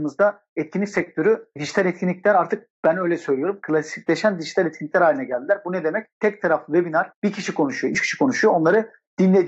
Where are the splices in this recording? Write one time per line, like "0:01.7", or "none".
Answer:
0:07.9

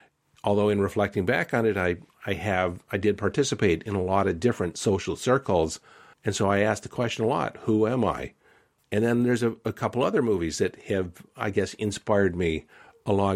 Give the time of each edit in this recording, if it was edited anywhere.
0:06.1
0:08.8

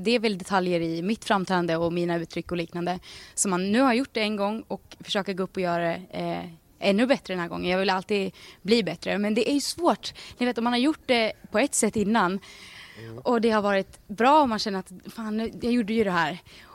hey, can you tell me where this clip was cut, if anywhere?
none

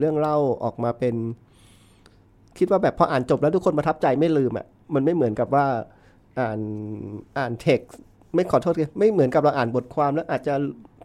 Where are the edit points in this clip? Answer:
0:07.3

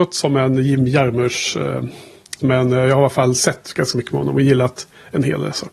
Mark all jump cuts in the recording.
0:02.4

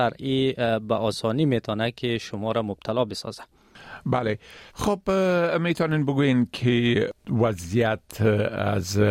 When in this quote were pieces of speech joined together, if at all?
0:04.7

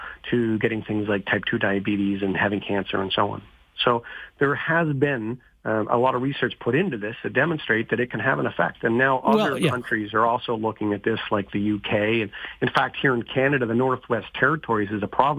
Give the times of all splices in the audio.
none

